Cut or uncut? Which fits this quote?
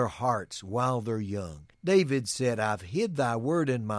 cut